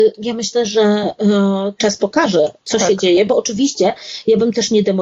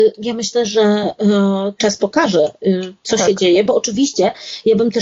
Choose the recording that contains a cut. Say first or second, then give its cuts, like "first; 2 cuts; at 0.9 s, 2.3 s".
first; 1 cut; at 2.6 s